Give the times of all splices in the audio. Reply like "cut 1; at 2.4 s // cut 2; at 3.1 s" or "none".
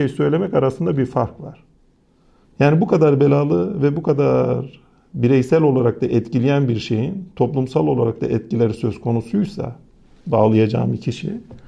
cut 1; at 2.4 s